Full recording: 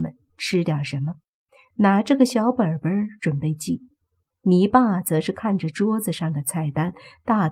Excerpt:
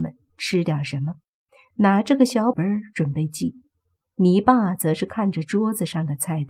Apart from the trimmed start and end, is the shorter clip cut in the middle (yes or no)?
yes